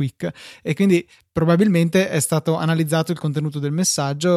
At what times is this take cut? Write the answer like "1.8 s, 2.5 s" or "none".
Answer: none